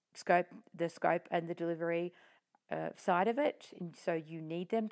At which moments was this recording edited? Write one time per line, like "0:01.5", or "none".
none